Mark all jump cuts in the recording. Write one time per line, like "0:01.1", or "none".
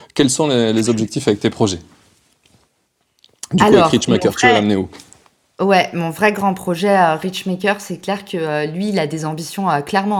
none